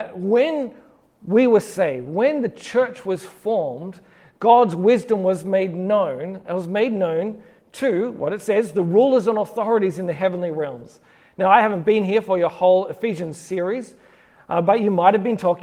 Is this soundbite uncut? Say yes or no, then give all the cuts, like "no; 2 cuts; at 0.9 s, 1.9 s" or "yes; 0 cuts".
yes; 0 cuts